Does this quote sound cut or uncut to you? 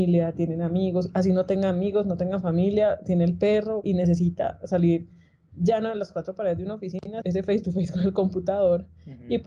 cut